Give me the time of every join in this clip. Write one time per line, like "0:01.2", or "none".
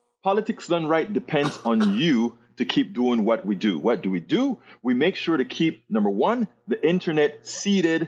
none